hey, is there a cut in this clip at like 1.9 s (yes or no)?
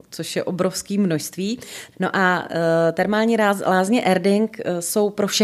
yes